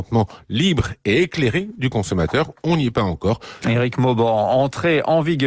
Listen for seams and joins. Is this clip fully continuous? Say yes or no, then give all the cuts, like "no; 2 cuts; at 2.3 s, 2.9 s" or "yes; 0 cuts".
no; 1 cut; at 3.6 s